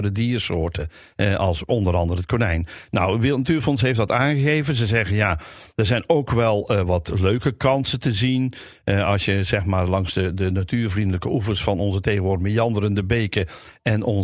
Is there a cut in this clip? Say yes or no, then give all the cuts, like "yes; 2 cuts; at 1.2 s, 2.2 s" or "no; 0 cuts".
no; 0 cuts